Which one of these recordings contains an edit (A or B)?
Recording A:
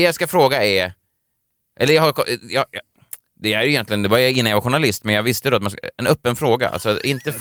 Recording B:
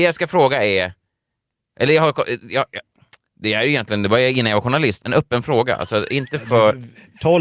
B